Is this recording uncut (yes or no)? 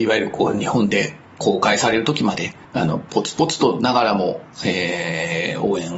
no